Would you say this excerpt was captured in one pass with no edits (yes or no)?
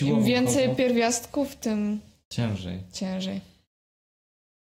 yes